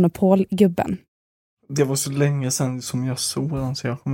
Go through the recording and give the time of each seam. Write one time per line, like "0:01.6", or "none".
0:01.5